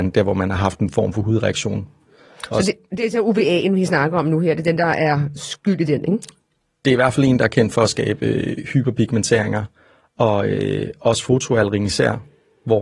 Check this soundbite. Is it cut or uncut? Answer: uncut